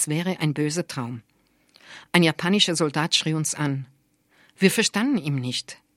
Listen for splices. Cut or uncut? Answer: uncut